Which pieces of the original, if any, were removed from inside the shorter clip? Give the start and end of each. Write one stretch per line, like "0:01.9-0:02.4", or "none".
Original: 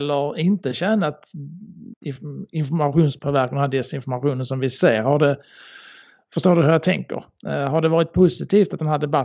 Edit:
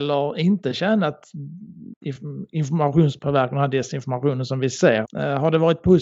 0:05.0-0:07.3